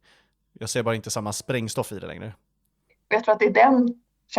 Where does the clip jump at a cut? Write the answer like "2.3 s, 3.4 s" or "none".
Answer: 2.9 s